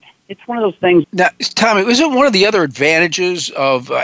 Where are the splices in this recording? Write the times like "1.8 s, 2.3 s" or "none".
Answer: 1.0 s